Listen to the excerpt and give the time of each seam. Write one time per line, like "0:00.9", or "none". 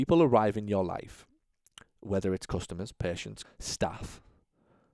0:03.4

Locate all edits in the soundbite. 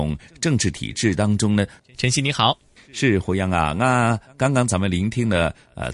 0:01.8

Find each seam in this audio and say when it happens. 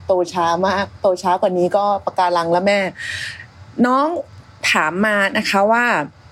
none

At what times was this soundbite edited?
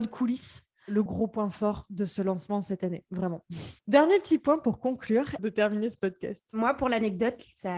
0:01.1
0:03.8
0:05.4

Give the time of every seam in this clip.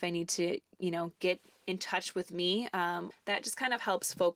0:03.1

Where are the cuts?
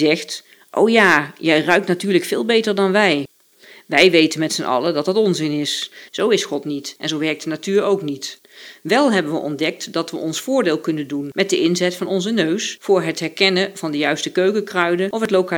0:06.1

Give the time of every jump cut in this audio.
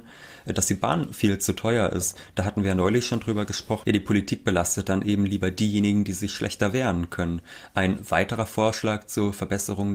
0:03.8

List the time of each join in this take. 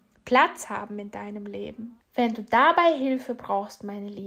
0:02.0

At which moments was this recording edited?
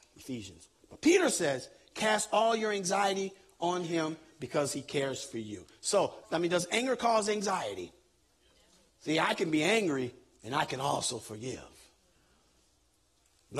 0:06.2
0:08.9

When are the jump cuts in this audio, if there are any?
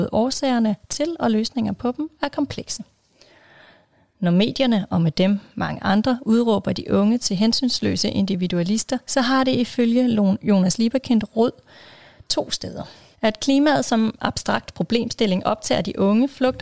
0:09.0
0:13.1

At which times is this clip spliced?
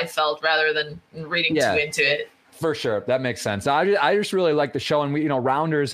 none

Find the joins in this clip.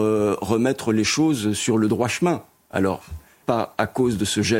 0:03.4

